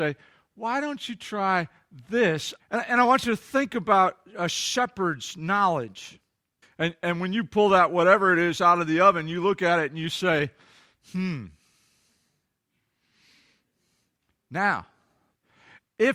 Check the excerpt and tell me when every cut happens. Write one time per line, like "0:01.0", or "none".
0:02.6
0:06.6